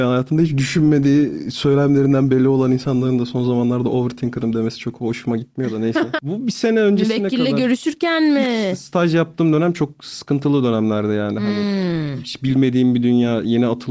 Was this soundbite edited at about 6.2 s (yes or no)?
yes